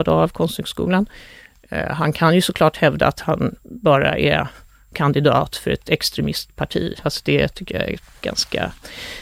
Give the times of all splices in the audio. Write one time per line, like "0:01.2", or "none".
0:07.0